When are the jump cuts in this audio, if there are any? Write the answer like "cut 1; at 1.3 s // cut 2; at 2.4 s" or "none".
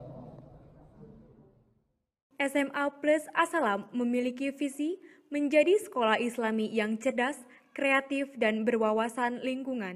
none